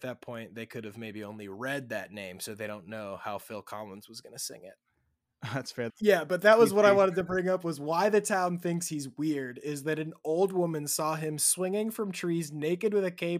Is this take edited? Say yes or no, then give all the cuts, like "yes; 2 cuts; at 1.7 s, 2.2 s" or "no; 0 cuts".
yes; 1 cut; at 5.9 s